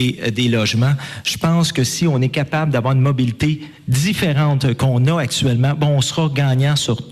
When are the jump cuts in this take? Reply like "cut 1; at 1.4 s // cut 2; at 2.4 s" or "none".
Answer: none